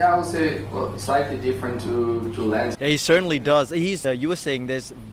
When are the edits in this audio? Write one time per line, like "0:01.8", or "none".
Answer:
0:02.7
0:04.0